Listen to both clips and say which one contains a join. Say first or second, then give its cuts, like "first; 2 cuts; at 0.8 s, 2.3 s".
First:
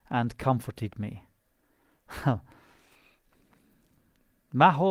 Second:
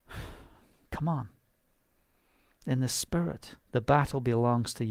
second; 1 cut; at 3.6 s